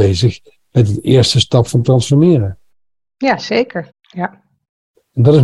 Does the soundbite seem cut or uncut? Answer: cut